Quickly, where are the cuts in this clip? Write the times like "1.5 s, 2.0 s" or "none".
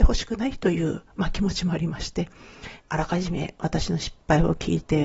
2.8 s